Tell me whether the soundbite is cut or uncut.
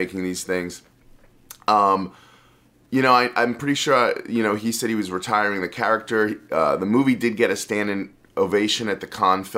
uncut